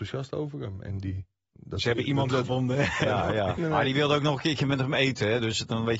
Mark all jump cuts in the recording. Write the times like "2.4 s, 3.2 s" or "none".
3.6 s